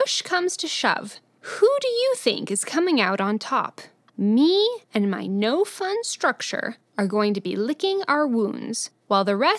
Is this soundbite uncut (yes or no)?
no